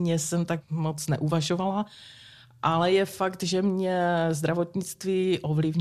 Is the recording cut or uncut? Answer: uncut